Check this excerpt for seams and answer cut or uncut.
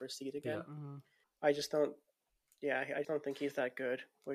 cut